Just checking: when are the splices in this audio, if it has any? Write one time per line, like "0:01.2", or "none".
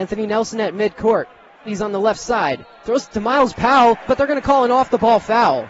0:01.7
0:04.1